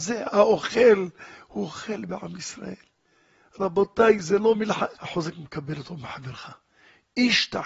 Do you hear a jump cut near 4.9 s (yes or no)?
yes